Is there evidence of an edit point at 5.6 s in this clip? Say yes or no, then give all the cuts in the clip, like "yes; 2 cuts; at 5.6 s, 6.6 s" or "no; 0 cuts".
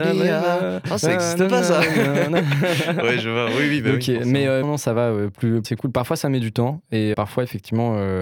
yes; 3 cuts; at 4.6 s, 5.6 s, 7.1 s